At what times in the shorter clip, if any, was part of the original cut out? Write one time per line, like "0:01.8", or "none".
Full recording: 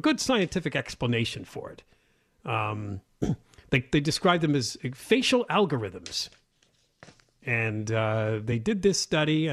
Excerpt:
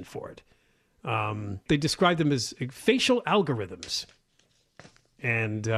0:01.7